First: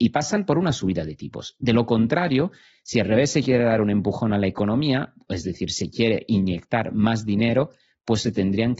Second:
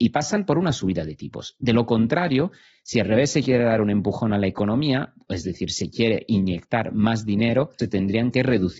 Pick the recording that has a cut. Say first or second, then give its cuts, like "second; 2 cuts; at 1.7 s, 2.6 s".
second; 1 cut; at 7.8 s